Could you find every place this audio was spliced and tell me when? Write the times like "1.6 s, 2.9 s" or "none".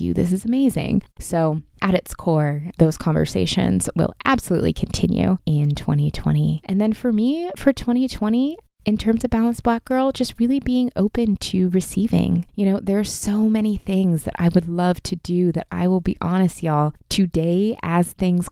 none

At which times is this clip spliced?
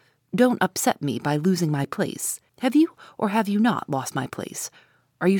2.5 s

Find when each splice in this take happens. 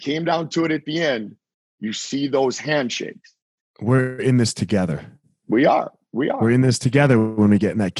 3.6 s

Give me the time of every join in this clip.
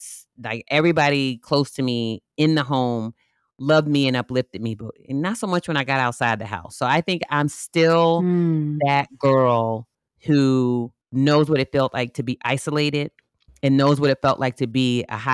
11.0 s

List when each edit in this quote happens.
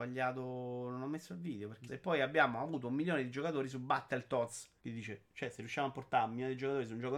1.9 s, 4.8 s

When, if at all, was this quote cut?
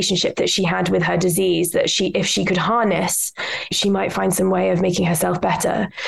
3.7 s

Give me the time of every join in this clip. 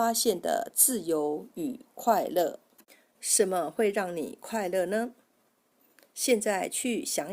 none

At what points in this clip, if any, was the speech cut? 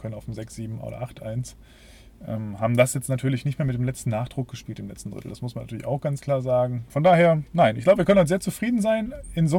6.9 s

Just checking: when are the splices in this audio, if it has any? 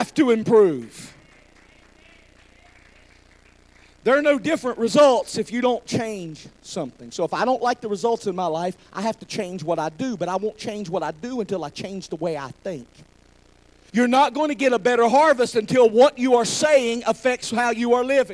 13.9 s

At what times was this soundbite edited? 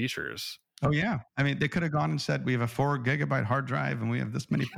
none

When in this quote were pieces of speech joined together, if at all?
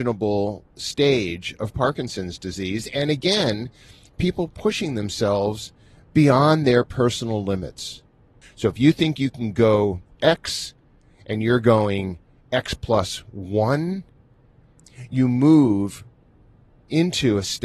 8.4 s

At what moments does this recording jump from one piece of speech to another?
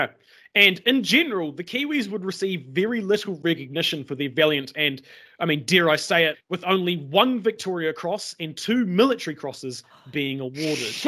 6.3 s

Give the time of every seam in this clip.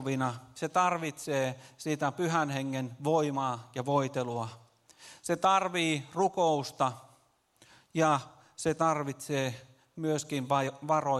none

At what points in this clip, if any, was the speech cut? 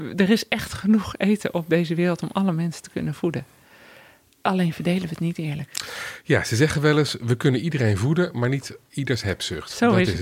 none

